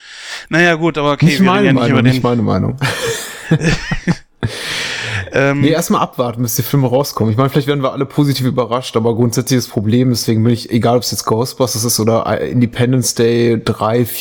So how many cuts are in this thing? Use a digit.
0